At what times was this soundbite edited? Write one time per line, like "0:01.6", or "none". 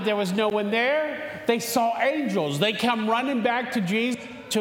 none